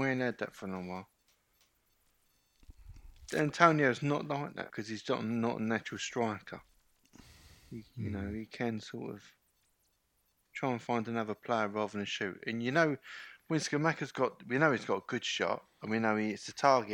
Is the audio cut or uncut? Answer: cut